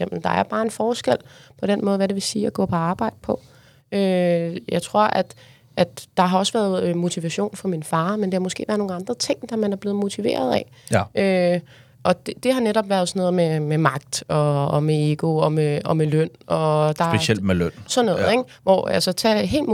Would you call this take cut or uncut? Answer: uncut